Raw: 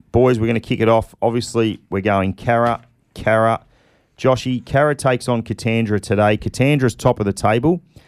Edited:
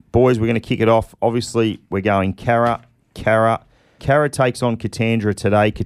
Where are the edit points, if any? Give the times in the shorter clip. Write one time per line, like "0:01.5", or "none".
0:04.0